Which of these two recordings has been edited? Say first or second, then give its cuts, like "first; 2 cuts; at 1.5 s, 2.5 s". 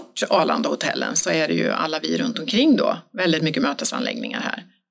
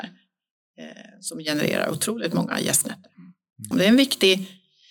second; 1 cut; at 3.7 s